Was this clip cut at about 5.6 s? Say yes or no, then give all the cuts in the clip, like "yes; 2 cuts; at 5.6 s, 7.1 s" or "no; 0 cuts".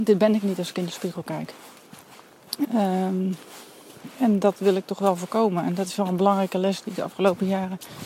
no; 1 cut; at 2.6 s